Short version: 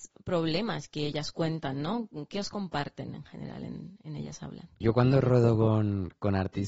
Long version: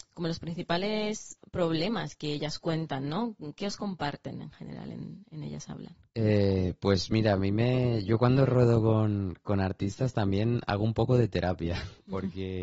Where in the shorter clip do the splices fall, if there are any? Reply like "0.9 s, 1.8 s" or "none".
4.8 s